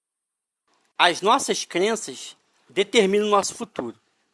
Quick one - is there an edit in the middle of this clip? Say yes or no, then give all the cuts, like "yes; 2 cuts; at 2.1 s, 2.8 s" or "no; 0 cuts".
yes; 1 cut; at 2.6 s